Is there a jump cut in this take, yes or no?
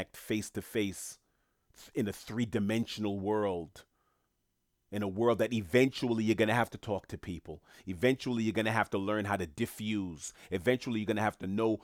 no